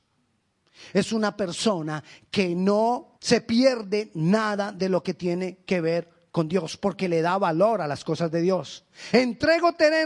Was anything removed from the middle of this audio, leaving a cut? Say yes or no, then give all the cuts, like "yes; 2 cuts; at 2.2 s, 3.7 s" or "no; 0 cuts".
yes; 2 cuts; at 3.1 s, 9.1 s